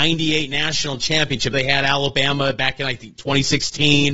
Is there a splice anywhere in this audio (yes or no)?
yes